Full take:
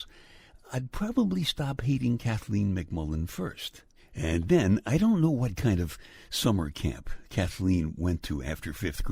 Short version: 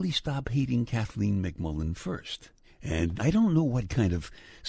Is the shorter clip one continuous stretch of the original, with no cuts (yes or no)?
no